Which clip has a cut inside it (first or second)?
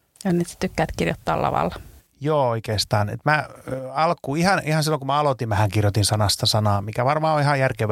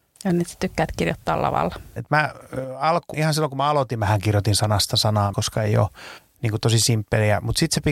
second